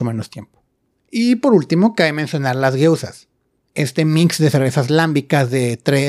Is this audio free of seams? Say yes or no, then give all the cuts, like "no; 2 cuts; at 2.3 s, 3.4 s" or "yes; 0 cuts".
no; 1 cut; at 0.9 s